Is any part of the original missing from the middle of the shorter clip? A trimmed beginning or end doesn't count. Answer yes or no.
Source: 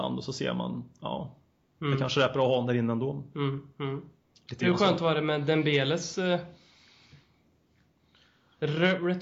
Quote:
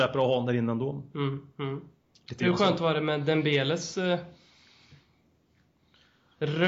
no